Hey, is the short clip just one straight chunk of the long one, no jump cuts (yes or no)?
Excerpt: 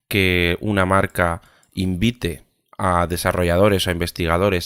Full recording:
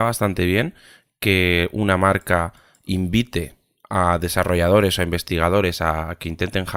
yes